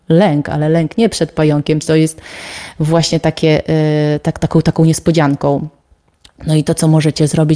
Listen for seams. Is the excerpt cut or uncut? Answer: cut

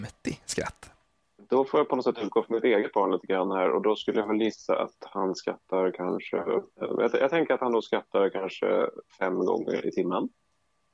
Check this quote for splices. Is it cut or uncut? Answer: cut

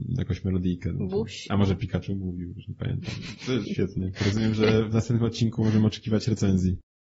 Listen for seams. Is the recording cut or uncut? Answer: cut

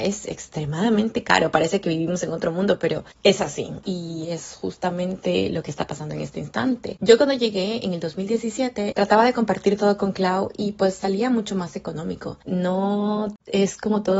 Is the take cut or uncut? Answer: cut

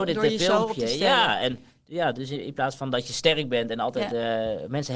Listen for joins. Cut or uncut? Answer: uncut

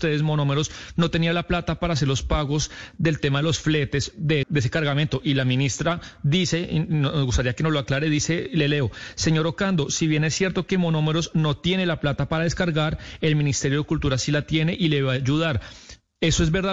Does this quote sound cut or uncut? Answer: cut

